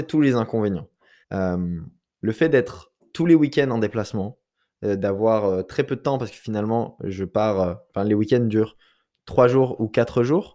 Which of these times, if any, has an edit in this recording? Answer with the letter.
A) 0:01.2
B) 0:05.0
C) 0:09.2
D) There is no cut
A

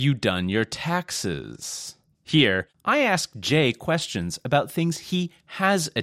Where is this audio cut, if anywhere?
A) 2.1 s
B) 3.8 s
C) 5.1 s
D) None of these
A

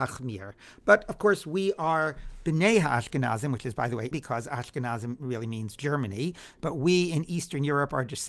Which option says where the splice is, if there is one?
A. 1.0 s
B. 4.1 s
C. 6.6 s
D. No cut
B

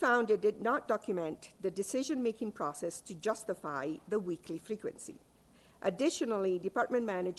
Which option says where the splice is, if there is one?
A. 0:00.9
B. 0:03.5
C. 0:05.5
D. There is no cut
D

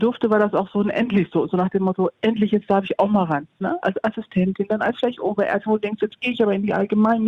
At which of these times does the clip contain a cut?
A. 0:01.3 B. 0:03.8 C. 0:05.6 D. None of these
B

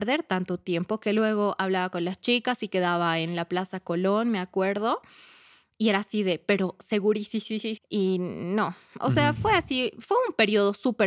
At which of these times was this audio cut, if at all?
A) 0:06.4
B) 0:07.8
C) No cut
B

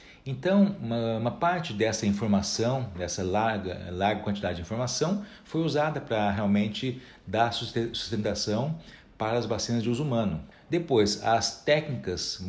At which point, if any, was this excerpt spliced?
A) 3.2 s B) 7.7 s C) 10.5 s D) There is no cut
C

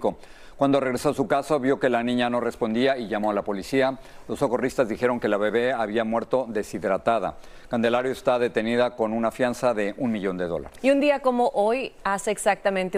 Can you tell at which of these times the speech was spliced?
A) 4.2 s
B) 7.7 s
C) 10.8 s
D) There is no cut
C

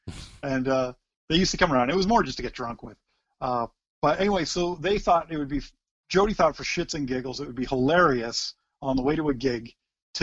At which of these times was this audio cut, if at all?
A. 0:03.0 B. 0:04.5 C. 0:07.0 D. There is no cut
D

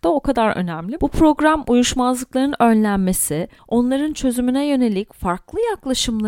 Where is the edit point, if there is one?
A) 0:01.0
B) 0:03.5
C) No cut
A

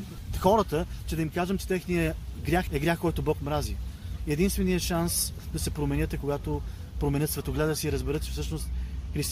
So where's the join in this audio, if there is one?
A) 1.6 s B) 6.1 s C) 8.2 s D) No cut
D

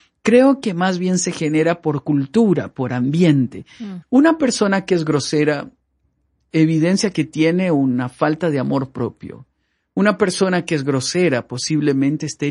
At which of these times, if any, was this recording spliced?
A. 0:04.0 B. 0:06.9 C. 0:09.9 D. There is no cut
A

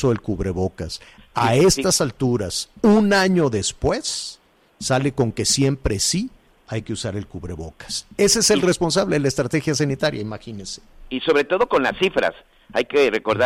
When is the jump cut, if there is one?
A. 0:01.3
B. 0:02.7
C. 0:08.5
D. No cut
D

